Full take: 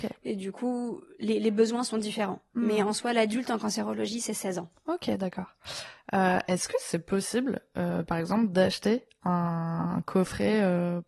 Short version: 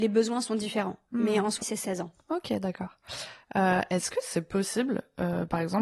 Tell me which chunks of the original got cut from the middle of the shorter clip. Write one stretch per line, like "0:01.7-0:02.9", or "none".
0:03.0-0:04.2